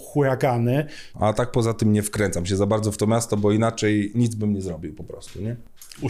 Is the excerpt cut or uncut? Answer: cut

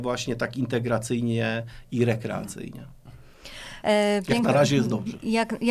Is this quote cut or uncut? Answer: cut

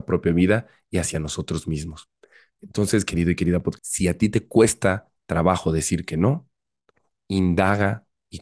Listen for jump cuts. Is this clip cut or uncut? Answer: cut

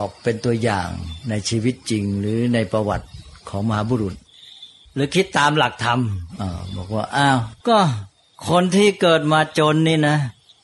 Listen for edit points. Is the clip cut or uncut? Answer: cut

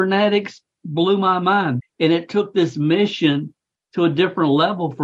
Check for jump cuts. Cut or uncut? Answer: cut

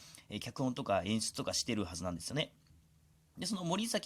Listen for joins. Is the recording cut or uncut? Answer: uncut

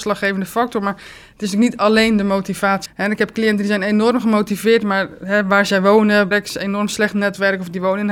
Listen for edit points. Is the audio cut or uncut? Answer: cut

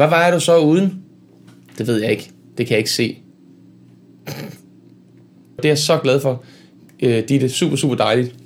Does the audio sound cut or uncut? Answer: cut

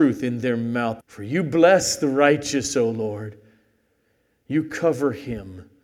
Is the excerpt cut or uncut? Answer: cut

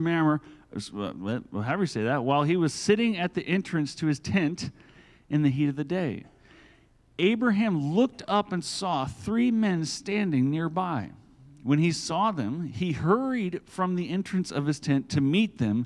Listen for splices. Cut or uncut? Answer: uncut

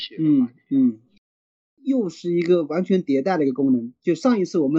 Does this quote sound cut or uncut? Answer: cut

